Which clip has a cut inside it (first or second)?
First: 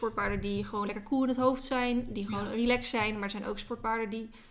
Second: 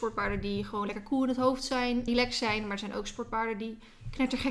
second